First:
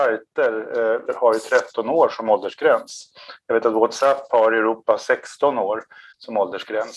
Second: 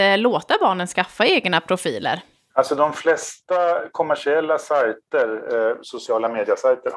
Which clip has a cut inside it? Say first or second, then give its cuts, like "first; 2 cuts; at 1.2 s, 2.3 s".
first; 1 cut; at 1.1 s